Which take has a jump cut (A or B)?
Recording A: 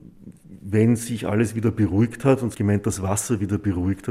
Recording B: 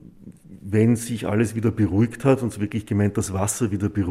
A